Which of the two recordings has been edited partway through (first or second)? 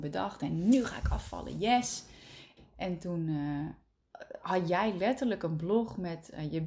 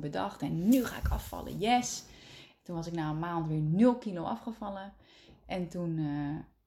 first